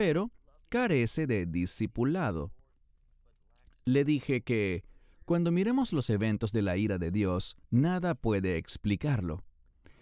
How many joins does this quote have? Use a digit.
1